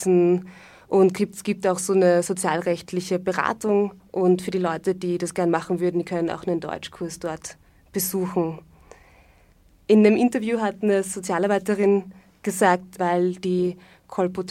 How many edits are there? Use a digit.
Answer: 1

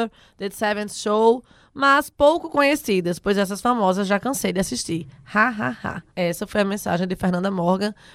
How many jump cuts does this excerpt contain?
1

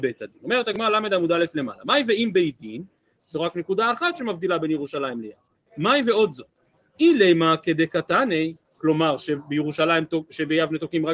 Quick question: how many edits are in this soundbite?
2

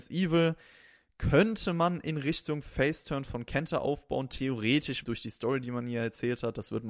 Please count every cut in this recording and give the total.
1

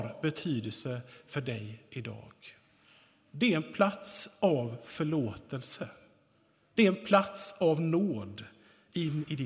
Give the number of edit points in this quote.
0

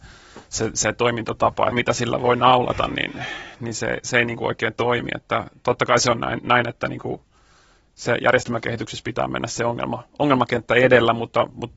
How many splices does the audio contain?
1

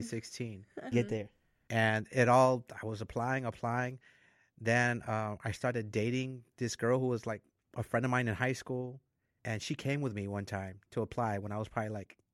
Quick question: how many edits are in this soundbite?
1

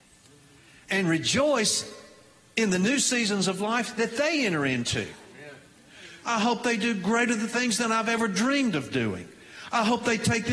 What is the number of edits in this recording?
1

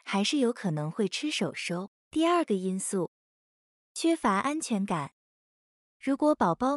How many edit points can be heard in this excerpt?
1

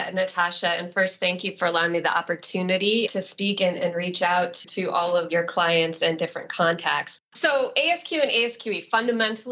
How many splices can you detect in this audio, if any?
0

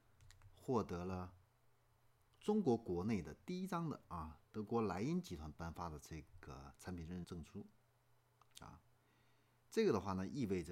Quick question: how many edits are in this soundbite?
1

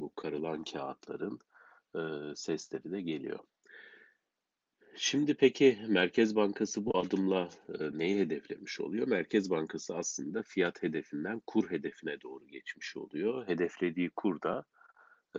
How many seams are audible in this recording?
0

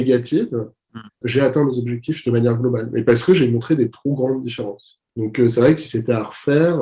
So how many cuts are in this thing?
2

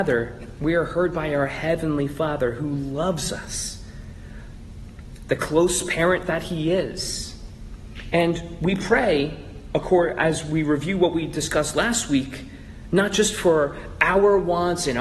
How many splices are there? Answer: 1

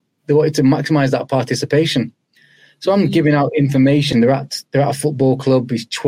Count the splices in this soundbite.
1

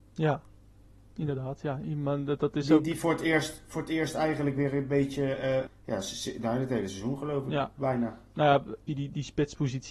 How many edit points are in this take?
2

